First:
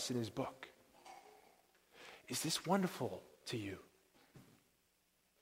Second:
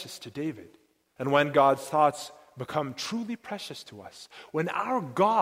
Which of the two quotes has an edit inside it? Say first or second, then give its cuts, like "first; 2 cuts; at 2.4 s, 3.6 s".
second; 1 cut; at 1.2 s